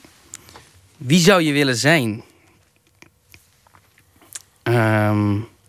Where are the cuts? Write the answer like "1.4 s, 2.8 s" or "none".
none

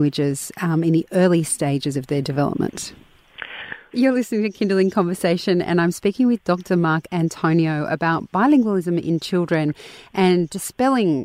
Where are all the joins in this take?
3.9 s

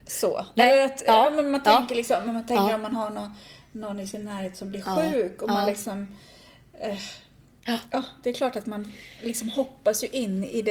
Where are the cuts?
none

